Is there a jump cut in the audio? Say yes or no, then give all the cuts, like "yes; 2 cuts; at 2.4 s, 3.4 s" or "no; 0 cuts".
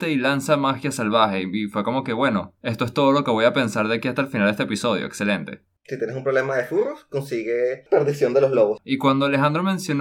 yes; 2 cuts; at 5.8 s, 8.8 s